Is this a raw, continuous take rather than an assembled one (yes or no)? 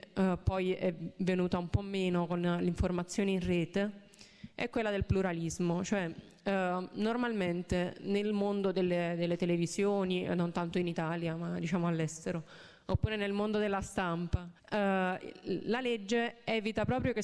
no